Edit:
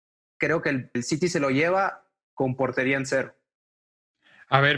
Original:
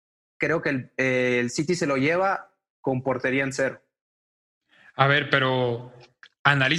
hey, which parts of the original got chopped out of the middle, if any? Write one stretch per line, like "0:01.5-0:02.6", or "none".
0:00.9-0:01.4